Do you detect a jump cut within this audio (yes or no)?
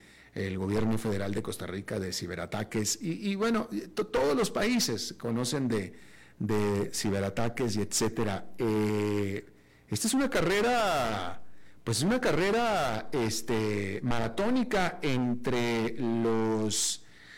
no